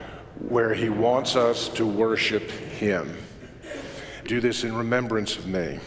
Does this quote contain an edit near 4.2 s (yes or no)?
yes